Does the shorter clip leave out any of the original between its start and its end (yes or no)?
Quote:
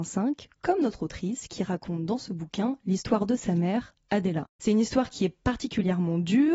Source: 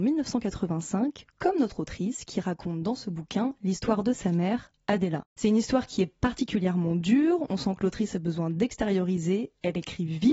no